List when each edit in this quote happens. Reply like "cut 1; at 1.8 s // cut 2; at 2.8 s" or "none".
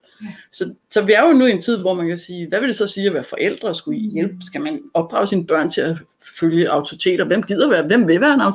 none